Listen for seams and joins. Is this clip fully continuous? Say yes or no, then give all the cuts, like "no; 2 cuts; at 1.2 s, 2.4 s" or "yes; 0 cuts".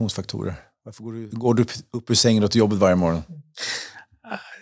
no; 1 cut; at 1.3 s